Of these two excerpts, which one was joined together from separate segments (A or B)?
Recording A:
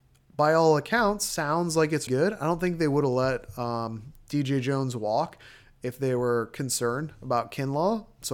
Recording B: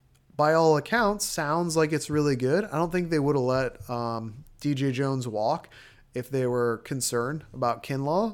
A